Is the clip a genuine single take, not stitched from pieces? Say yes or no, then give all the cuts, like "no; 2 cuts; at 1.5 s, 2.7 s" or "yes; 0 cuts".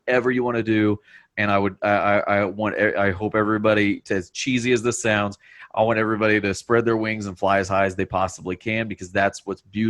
yes; 0 cuts